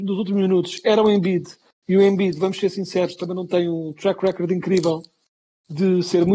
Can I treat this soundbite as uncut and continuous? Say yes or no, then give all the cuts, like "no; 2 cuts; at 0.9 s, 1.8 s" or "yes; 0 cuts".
yes; 0 cuts